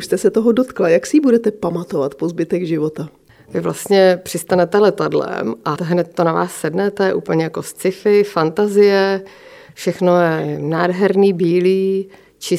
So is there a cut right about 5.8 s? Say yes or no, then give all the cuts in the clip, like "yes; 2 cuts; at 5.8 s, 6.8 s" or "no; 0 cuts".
yes; 1 cut; at 5.8 s